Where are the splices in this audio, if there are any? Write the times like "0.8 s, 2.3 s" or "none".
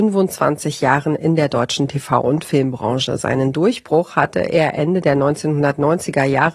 none